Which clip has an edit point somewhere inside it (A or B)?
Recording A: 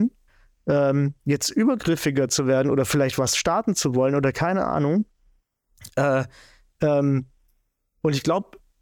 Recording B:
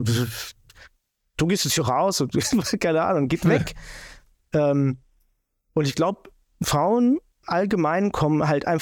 A